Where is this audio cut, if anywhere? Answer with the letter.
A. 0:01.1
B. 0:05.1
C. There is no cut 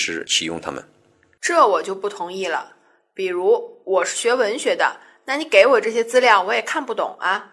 C